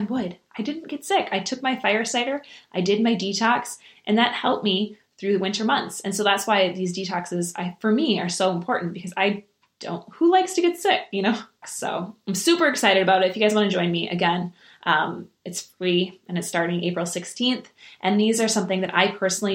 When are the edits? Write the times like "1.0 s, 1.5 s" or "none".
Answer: 11.6 s

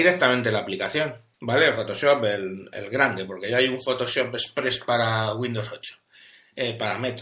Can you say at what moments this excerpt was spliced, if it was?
1.3 s

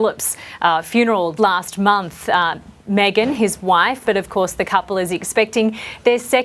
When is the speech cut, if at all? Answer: 1.4 s, 4.0 s

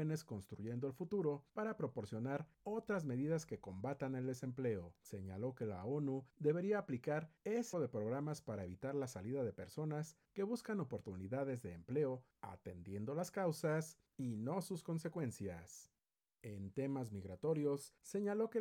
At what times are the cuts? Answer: 7.7 s, 16.3 s

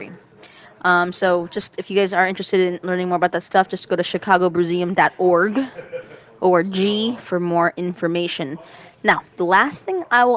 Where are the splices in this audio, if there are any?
none

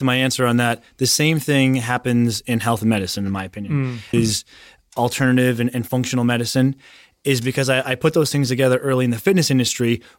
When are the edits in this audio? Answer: 4.1 s

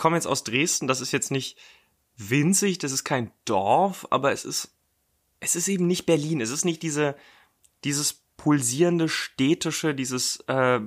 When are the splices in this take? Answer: none

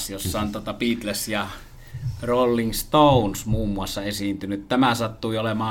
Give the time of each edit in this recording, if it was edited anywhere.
none

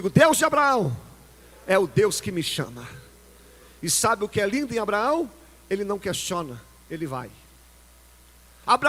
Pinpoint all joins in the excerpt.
none

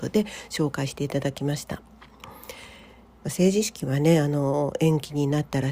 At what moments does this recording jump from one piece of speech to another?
3.1 s

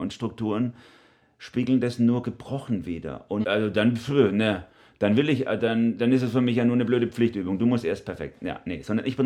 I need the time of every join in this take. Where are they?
3.4 s

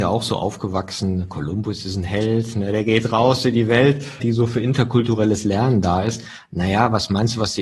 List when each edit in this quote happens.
4.2 s

